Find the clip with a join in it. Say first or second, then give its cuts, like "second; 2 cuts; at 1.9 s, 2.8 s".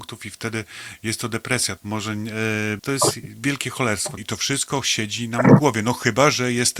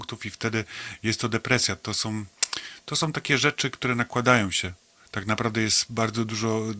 first; 3 cuts; at 1.8 s, 2.8 s, 4.2 s